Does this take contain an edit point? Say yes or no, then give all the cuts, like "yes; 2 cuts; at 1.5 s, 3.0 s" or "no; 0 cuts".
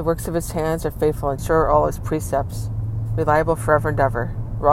yes; 1 cut; at 1.4 s